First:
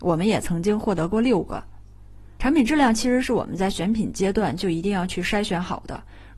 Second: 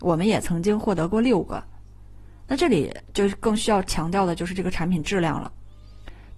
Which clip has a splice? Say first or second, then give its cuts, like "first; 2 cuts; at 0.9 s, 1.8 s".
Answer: first; 1 cut; at 2.4 s